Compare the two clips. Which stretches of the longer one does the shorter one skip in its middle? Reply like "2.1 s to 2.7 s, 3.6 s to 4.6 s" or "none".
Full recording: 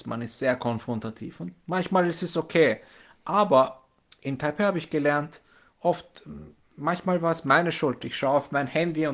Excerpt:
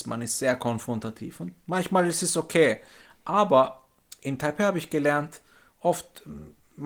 none